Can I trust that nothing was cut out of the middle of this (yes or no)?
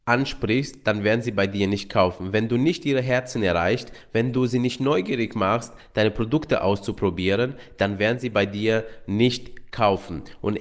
yes